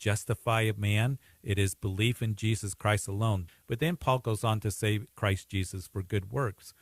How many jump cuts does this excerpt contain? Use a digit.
2